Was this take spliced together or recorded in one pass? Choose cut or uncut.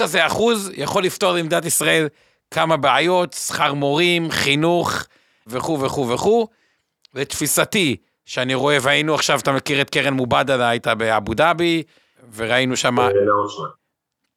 uncut